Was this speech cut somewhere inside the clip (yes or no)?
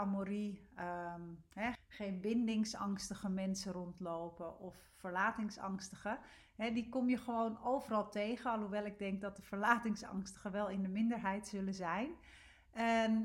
yes